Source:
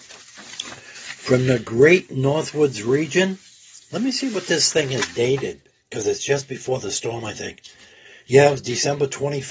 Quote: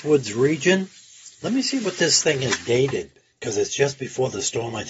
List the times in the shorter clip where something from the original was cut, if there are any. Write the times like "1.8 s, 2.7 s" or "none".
none